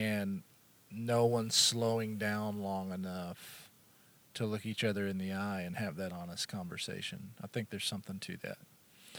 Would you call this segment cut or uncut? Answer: uncut